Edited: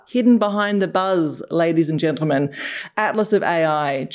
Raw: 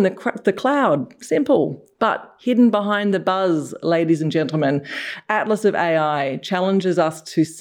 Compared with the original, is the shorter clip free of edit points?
yes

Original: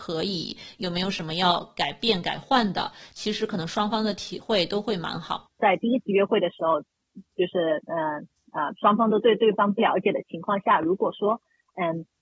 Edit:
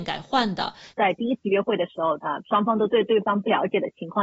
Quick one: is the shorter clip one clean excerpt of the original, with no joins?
no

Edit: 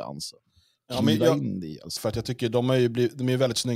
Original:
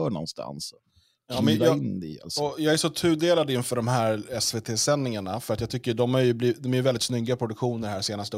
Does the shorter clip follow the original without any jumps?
no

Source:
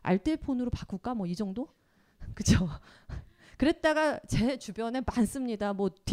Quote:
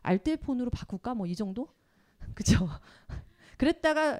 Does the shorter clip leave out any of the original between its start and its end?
no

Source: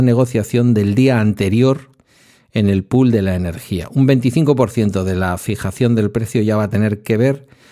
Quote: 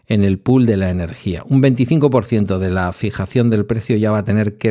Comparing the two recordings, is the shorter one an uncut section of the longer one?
yes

